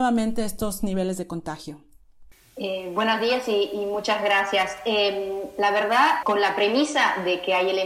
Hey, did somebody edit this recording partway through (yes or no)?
yes